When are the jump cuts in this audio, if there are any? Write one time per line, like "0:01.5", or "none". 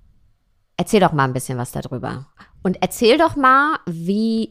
none

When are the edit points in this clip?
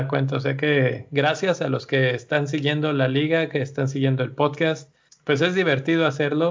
0:05.1

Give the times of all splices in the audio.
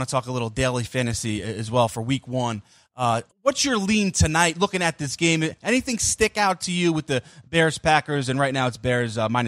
0:03.3

